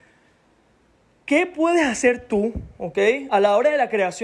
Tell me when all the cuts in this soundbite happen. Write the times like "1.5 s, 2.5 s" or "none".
none